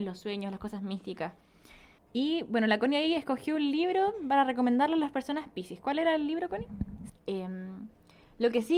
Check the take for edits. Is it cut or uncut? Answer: cut